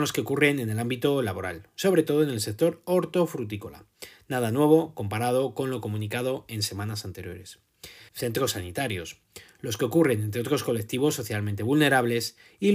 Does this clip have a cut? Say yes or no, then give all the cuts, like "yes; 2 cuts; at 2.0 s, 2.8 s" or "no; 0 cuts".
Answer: yes; 1 cut; at 8.1 s